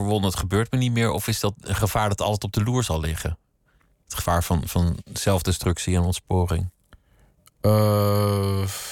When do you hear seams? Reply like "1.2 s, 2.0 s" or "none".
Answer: none